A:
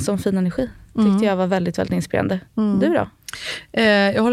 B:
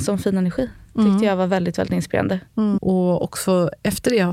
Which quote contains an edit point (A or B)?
B